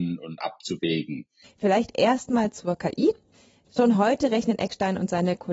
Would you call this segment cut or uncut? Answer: cut